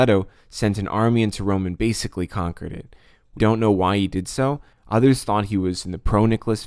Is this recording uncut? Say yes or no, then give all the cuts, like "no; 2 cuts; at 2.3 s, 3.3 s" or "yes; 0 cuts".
no; 2 cuts; at 3.4 s, 4.7 s